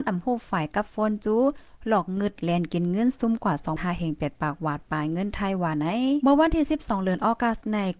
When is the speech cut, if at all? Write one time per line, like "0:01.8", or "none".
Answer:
0:03.8